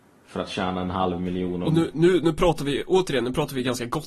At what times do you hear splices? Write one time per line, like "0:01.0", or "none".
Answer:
none